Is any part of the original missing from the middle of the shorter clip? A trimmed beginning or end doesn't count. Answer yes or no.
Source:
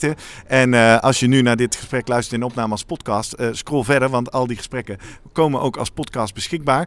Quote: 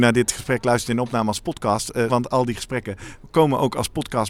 yes